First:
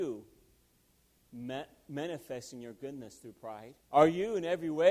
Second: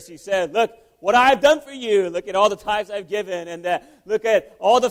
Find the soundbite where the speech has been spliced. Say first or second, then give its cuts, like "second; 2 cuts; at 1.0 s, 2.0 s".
first; 1 cut; at 3.8 s